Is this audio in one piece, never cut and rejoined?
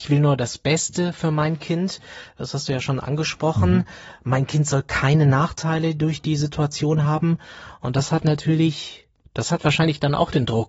yes; 0 cuts

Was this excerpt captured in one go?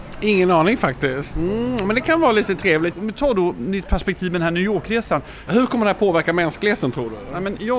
no; 3 cuts; at 1.3 s, 2.9 s, 5.5 s

